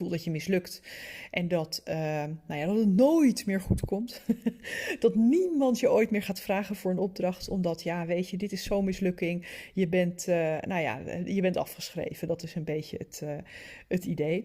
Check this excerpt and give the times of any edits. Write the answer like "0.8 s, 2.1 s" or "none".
none